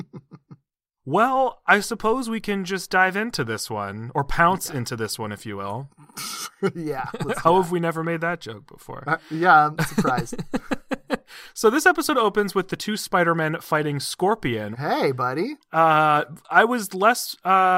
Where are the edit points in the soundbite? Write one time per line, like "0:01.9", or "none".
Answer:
0:14.7